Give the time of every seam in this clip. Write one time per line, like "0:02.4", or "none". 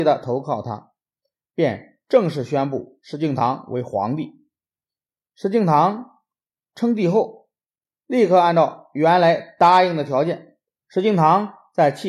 0:10.8